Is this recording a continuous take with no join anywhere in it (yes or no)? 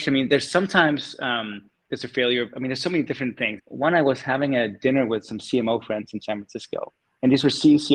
no